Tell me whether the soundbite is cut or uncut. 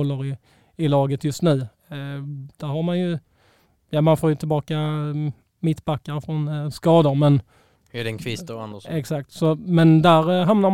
uncut